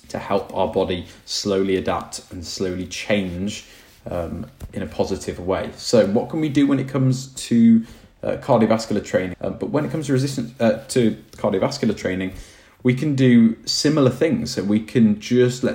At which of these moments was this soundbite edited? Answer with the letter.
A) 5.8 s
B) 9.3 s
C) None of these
B